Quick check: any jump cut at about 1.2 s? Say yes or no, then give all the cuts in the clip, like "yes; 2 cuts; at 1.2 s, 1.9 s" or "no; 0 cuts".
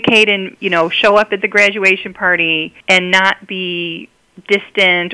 no; 1 cut; at 2.8 s